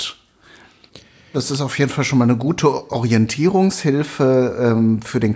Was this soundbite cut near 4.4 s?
no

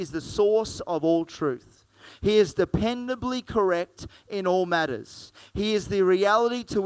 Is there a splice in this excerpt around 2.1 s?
no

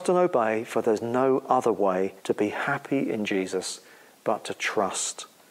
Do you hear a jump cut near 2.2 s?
yes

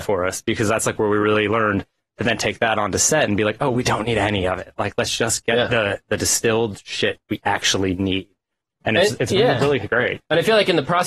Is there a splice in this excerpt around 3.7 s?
yes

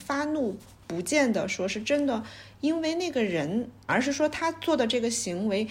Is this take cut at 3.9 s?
yes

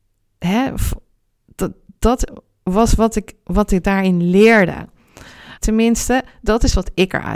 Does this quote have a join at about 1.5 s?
no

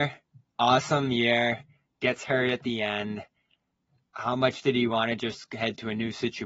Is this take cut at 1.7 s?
no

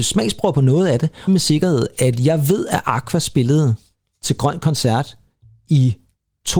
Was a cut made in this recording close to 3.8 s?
no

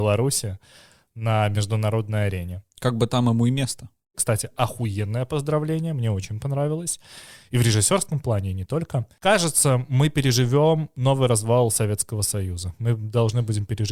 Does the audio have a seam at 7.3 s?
no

